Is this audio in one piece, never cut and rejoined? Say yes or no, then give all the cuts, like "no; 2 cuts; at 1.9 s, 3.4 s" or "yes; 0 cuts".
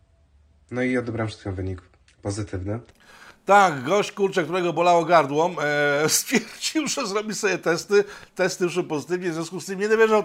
yes; 0 cuts